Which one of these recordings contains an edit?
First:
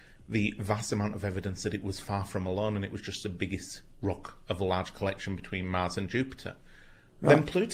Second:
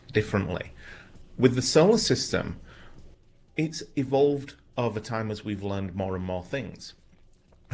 second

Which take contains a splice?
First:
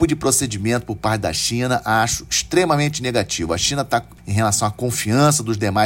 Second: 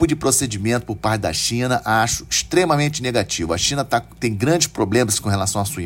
first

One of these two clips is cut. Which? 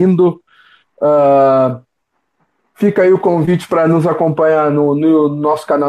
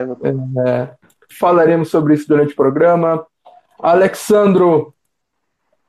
second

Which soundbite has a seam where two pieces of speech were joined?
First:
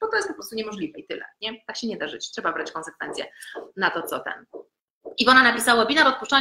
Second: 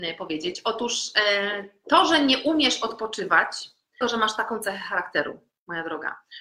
second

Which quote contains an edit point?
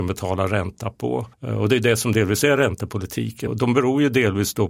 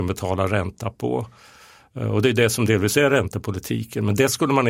first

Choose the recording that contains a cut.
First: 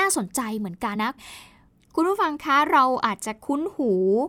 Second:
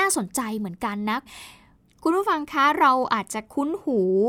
first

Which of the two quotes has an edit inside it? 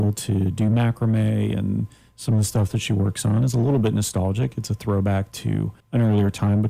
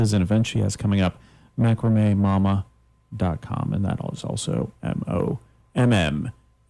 first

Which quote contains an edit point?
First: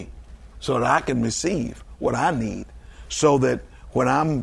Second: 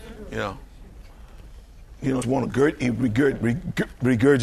second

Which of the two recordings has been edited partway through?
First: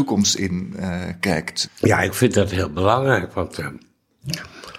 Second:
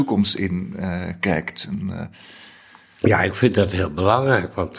first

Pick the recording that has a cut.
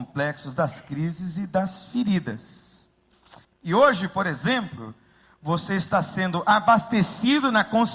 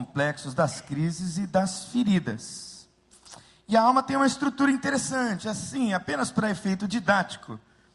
first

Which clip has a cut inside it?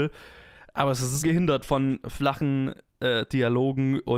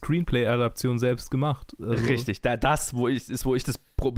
first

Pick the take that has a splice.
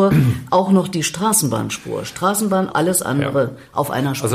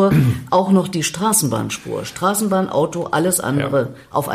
first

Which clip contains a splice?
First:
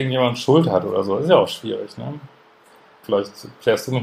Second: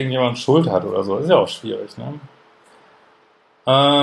first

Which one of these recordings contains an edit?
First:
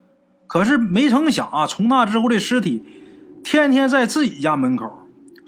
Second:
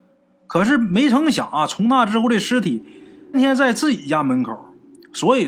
second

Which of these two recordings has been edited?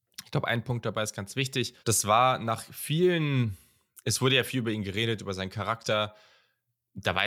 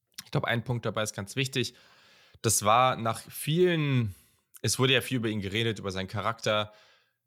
first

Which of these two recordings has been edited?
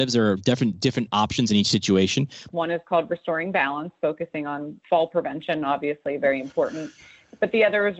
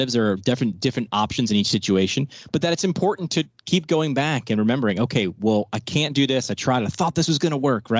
first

